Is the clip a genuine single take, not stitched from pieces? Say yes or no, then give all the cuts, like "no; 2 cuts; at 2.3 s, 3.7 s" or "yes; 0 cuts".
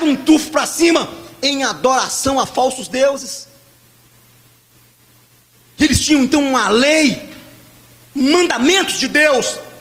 yes; 0 cuts